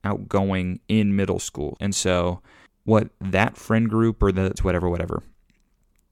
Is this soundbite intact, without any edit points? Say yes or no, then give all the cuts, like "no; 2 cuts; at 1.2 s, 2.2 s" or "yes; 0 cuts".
no; 2 cuts; at 1.8 s, 4.6 s